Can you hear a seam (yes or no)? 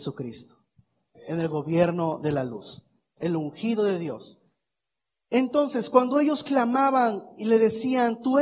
yes